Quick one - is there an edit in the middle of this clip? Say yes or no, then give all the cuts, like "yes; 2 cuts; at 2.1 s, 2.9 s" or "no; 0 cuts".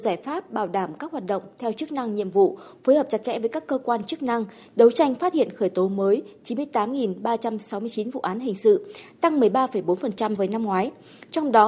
yes; 1 cut; at 10.4 s